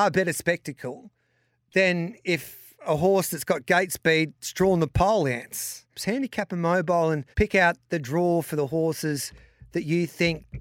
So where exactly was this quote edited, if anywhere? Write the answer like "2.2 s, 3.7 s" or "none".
6.0 s, 7.3 s